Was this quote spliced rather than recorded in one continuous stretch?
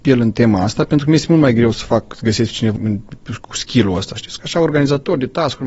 yes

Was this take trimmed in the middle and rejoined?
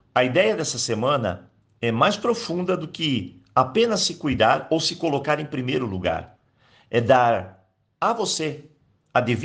no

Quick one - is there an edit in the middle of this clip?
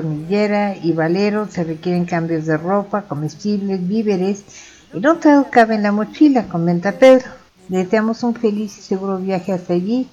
yes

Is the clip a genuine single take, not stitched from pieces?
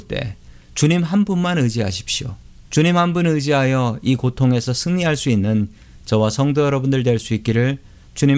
no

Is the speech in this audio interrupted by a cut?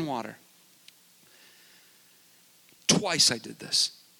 yes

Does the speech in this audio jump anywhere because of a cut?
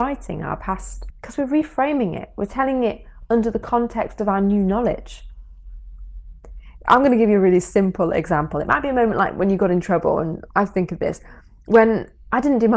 yes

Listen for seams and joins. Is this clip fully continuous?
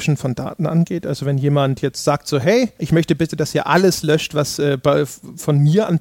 yes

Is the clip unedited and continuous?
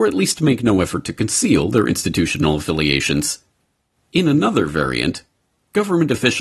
yes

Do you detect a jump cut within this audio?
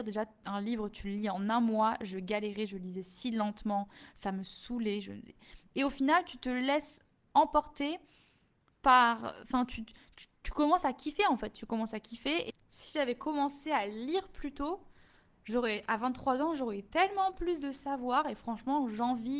no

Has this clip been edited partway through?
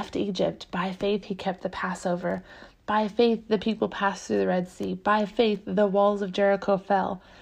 no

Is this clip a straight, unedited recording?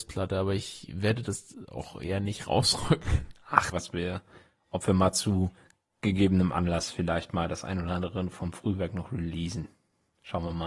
no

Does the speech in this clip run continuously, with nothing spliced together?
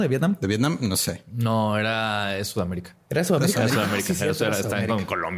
yes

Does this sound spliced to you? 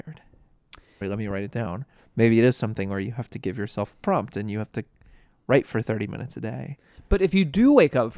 yes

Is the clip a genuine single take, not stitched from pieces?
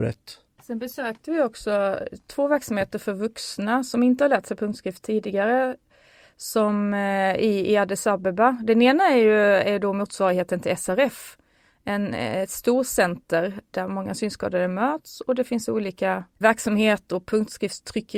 yes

